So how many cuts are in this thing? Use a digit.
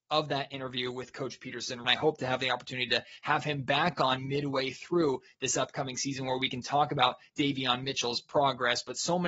2